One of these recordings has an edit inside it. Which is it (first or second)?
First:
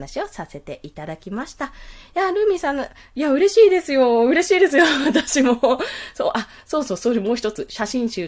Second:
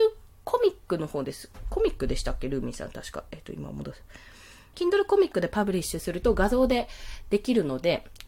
second